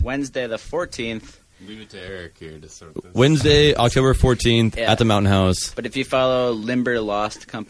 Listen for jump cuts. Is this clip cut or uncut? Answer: uncut